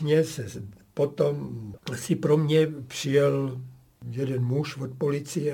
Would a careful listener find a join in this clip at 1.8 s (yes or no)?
yes